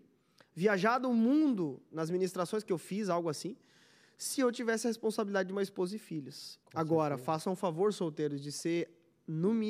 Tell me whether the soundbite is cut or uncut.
cut